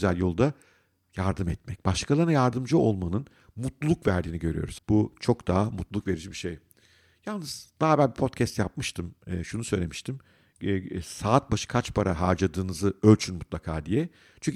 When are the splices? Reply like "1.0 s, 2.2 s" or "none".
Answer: 4.8 s